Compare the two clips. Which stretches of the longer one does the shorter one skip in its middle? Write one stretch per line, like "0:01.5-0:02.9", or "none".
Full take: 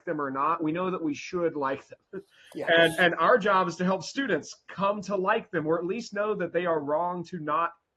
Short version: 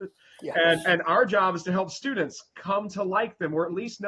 none